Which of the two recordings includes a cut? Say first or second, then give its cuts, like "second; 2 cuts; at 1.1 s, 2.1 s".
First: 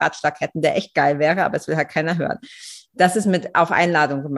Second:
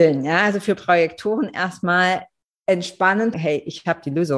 second; 1 cut; at 3.3 s